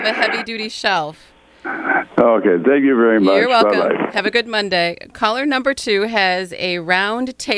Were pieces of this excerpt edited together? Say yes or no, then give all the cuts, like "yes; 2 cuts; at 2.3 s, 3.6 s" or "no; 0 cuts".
no; 0 cuts